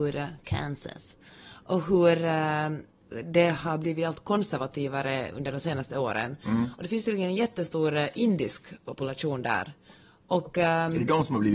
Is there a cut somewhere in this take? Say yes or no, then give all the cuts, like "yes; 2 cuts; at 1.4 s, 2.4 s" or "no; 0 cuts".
no; 0 cuts